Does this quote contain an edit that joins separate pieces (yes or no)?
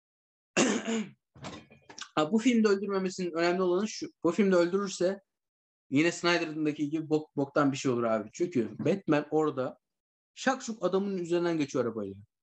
no